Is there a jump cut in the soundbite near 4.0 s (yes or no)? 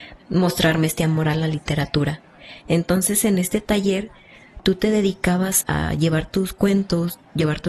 no